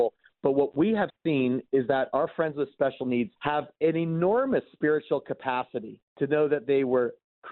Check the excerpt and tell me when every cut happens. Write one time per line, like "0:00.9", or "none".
0:03.4
0:06.1